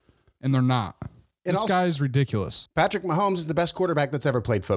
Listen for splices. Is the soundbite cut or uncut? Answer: cut